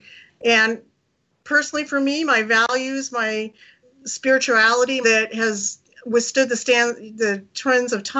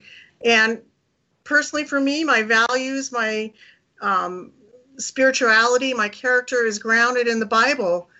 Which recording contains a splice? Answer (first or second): first